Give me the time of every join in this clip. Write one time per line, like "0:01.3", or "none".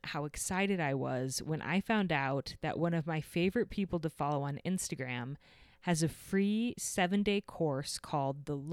none